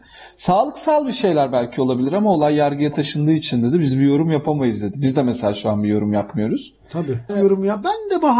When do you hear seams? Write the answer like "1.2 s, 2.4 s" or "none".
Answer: 7.3 s